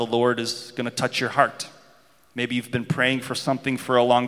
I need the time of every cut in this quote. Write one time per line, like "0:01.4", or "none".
none